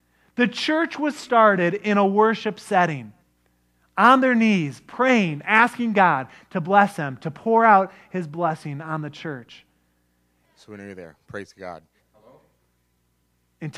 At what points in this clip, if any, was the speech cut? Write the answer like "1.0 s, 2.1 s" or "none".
10.4 s, 12.0 s